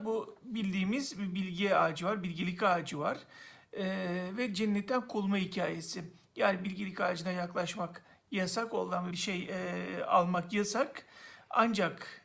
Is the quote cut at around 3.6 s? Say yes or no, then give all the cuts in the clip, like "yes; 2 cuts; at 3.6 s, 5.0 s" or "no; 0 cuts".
no; 1 cut; at 9.1 s